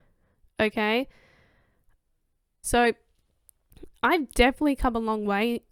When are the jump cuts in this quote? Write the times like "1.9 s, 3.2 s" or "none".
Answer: 2.6 s